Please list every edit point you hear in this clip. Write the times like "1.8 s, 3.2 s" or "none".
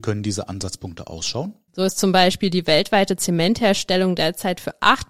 1.7 s